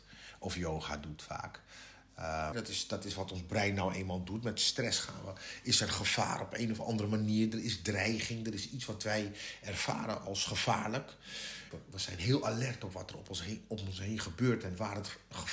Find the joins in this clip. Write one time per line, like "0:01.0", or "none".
0:02.5
0:11.7